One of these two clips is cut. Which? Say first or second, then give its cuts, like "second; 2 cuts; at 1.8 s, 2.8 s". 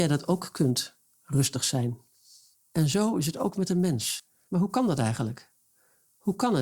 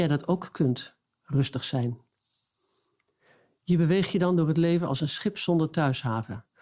first; 2 cuts; at 2.5 s, 4.5 s